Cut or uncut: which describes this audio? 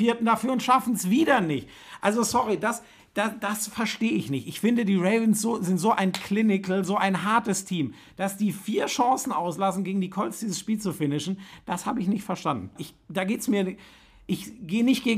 cut